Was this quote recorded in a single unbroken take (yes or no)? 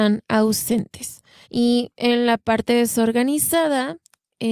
no